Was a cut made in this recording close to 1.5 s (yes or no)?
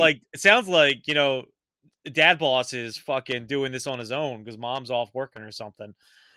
no